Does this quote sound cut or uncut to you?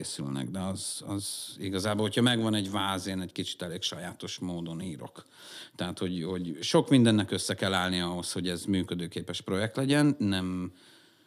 uncut